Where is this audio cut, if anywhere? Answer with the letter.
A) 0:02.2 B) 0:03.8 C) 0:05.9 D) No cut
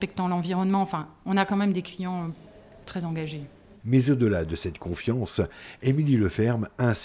B